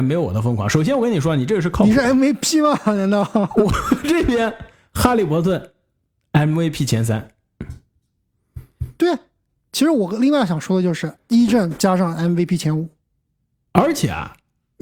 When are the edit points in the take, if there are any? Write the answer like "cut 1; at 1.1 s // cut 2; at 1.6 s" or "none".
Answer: cut 1; at 11.2 s